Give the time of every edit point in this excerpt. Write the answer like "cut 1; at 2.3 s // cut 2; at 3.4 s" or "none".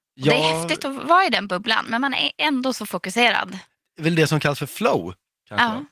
cut 1; at 1.9 s